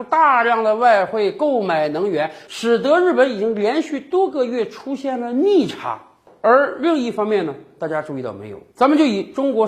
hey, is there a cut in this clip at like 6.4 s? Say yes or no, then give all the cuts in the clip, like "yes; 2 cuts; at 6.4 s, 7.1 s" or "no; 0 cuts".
no; 1 cut; at 8.7 s